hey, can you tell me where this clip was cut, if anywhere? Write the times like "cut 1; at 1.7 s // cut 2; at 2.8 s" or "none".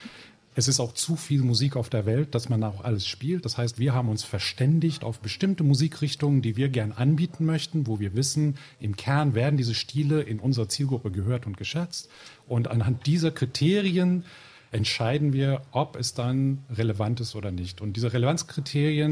none